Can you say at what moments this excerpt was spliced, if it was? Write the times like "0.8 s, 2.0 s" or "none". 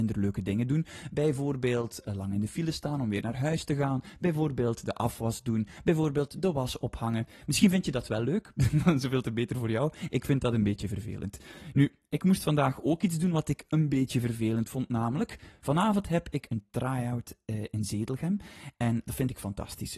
none